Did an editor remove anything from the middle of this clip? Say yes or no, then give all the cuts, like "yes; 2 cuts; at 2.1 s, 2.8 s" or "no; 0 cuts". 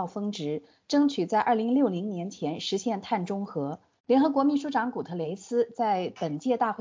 yes; 1 cut; at 4.0 s